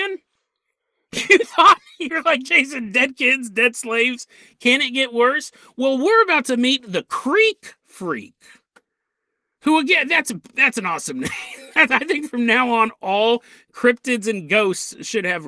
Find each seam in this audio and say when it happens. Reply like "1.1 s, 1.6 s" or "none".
none